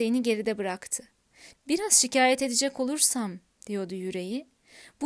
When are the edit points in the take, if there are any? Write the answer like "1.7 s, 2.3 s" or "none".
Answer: 1.5 s